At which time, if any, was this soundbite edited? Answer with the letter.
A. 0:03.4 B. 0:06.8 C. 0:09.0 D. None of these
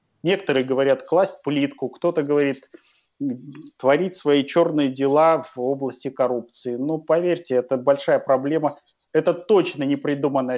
D